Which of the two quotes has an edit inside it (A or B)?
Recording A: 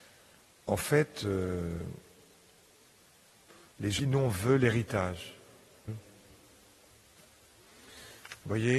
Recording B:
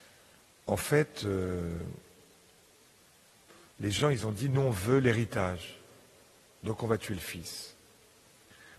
A